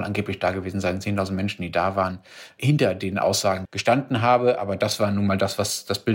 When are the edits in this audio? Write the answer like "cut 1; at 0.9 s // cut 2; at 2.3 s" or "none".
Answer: cut 1; at 3.7 s

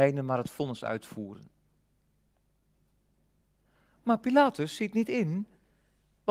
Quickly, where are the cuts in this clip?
none

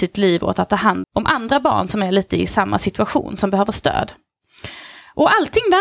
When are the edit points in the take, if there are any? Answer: cut 1; at 1.0 s

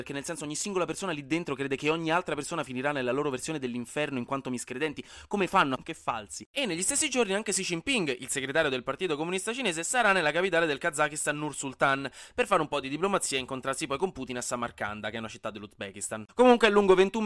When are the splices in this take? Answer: cut 1; at 5.7 s // cut 2; at 16.3 s

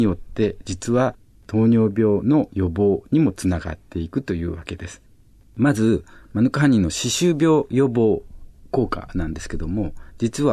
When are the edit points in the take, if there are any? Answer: none

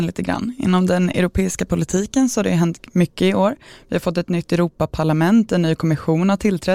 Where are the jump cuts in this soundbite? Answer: none

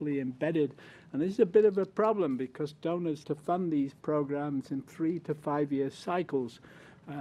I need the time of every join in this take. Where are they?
cut 1; at 3.2 s

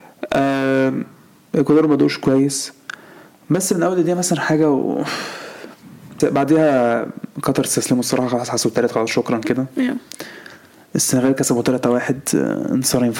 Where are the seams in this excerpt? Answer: cut 1; at 6.2 s

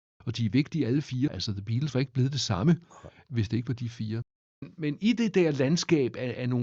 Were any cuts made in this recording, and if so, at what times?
cut 1; at 1.3 s

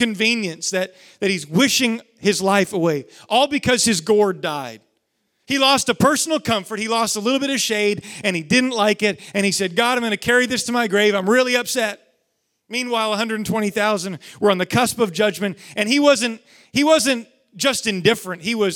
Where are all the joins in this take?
none

